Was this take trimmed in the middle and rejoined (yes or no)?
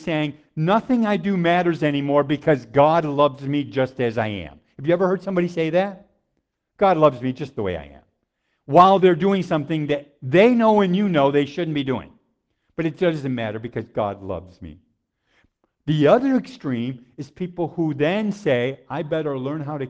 no